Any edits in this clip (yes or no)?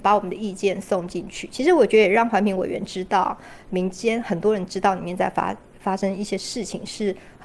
no